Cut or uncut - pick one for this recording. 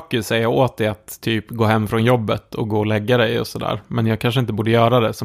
uncut